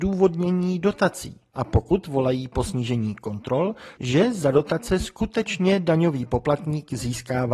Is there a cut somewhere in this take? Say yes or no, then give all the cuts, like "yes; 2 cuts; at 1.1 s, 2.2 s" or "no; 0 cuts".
yes; 2 cuts; at 1.5 s, 4.0 s